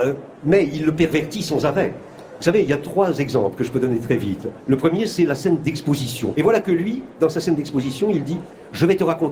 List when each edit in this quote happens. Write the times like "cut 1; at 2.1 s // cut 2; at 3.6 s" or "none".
cut 1; at 6.3 s

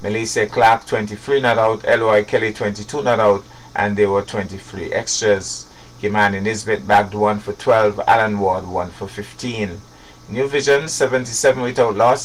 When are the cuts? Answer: none

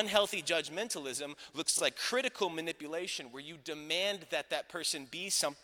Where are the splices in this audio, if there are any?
none

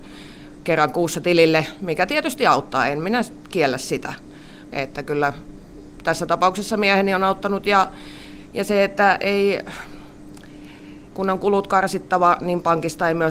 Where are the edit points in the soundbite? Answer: cut 1; at 4.7 s // cut 2; at 11.1 s

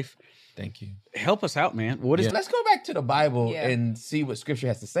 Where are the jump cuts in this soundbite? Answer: cut 1; at 2.3 s

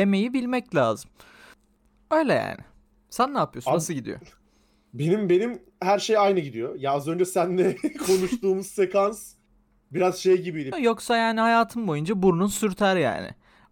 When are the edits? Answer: cut 1; at 10.7 s

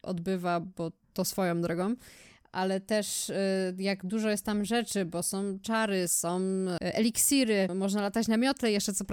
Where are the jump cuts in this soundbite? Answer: cut 1; at 1.0 s

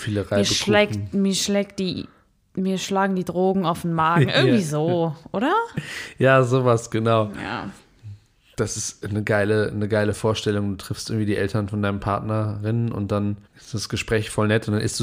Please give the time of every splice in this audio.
cut 1; at 13.5 s

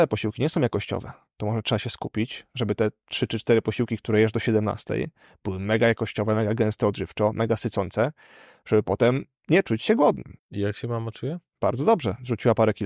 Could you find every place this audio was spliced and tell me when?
cut 1; at 10.4 s // cut 2; at 11.5 s

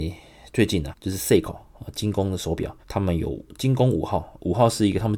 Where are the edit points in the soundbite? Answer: cut 1; at 0.9 s // cut 2; at 2.8 s

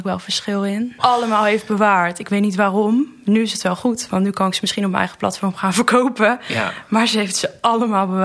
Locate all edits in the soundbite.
cut 1; at 1.0 s

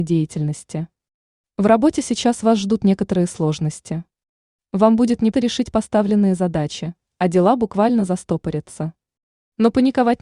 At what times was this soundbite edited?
cut 1; at 5.3 s

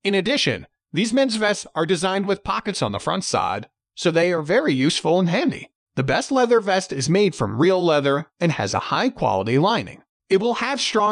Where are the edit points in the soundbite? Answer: none

